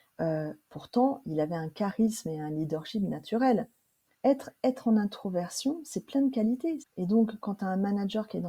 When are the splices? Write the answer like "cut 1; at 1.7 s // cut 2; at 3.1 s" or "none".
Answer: cut 1; at 4.1 s // cut 2; at 6.8 s